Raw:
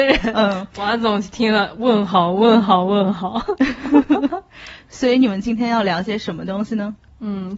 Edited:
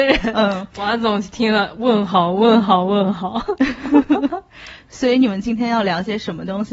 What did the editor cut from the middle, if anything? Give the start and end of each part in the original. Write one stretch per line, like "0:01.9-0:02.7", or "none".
none